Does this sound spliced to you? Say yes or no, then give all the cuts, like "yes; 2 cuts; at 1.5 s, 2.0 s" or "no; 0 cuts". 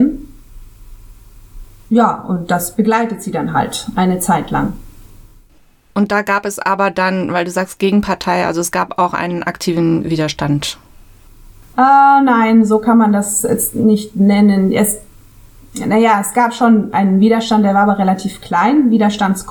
no; 0 cuts